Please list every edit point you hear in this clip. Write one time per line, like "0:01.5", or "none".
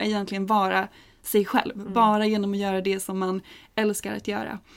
none